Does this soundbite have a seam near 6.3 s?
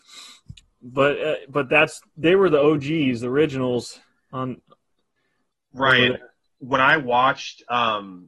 no; 1 cut; at 2.1 s

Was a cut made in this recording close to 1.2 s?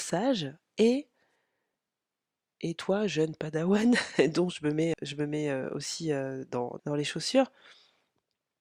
no; 2 cuts; at 4.9 s, 6.8 s

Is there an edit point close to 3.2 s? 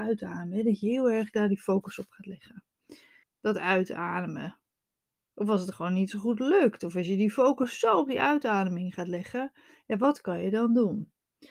yes; 1 cut; at 3.2 s

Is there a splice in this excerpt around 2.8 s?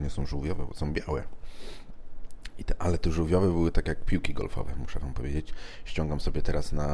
no; 0 cuts

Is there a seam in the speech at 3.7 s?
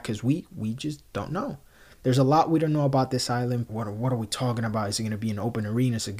yes; 1 cut; at 3.7 s

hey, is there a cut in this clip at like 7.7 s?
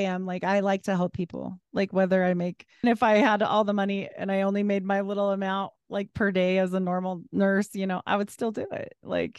no; 1 cut; at 2.8 s

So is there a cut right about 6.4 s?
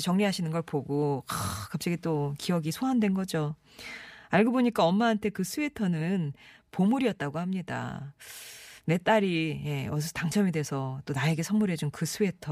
no; 0 cuts

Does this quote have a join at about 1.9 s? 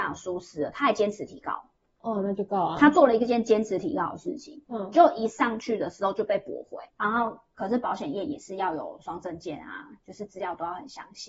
no; 1 cut; at 6.9 s

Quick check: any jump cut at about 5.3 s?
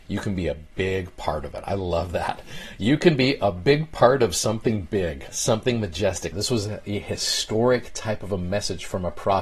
yes; 2 cuts; at 5.3 s, 6.3 s

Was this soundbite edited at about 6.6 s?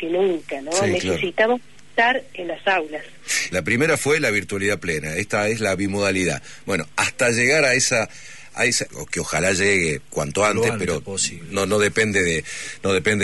no; 2 cuts; at 3.5 s, 8.9 s

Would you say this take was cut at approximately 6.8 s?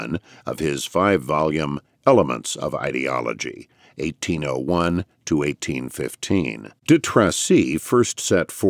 yes; 1 cut; at 6.8 s

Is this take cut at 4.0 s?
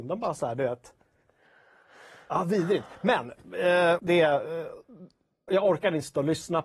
yes; 2 cuts; at 4.0 s, 5.5 s

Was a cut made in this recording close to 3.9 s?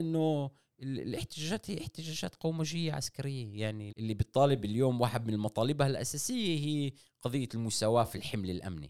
yes; 1 cut; at 3.9 s

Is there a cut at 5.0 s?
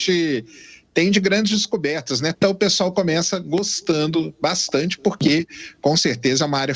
no; 1 cut; at 2.3 s

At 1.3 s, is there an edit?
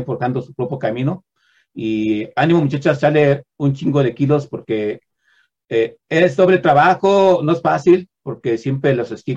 no; 0 cuts

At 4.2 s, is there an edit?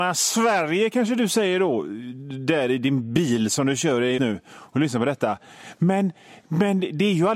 yes; 1 cut; at 4.2 s

